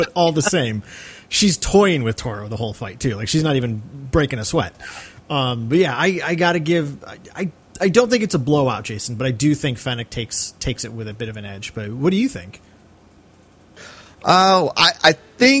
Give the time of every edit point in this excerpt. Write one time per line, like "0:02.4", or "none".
none